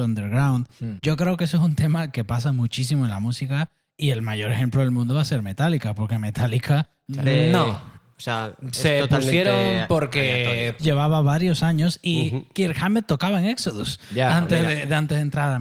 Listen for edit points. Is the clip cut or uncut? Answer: cut